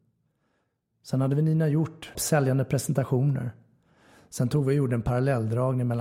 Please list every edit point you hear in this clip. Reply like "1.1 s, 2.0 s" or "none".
2.1 s